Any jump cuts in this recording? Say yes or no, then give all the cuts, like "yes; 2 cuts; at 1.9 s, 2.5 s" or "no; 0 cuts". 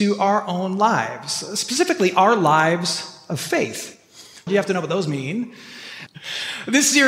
yes; 2 cuts; at 4.5 s, 6.1 s